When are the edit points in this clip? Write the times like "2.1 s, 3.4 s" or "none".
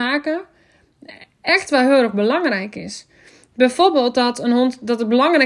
none